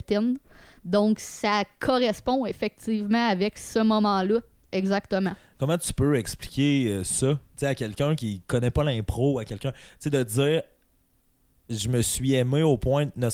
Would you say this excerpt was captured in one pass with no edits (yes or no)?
yes